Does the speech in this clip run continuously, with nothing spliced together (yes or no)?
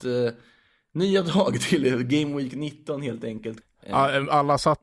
no